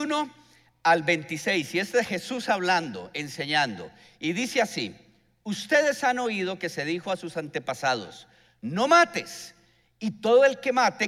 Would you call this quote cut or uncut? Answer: uncut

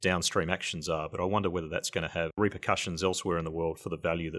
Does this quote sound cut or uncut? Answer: uncut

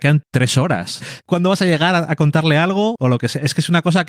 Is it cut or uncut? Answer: cut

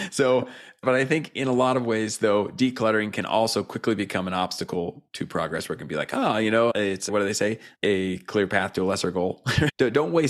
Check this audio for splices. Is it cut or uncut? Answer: uncut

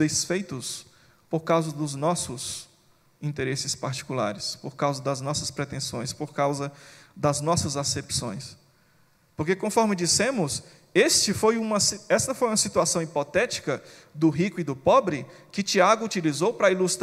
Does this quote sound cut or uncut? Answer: uncut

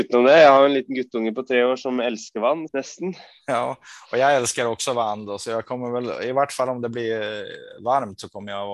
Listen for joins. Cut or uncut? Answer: cut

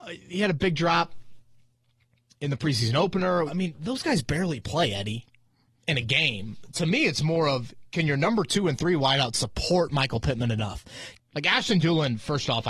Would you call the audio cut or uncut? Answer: cut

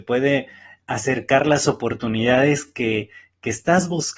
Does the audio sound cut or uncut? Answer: uncut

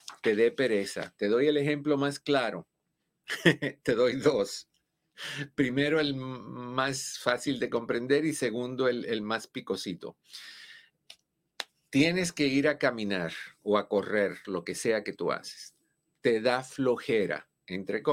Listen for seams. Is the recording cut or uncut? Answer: cut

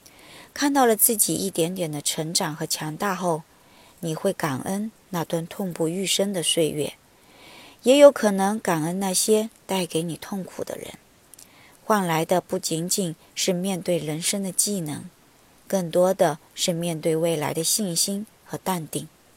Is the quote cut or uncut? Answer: uncut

